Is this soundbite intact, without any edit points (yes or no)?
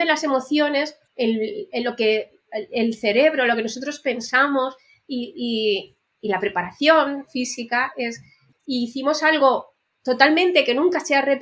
no